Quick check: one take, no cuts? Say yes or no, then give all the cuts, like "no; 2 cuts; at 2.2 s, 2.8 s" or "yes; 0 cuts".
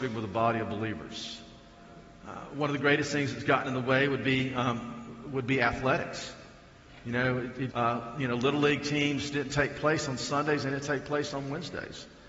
no; 1 cut; at 7.7 s